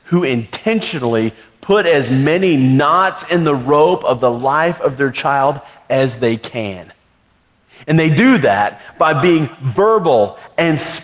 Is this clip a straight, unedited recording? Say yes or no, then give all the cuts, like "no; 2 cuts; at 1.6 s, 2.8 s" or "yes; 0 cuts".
yes; 0 cuts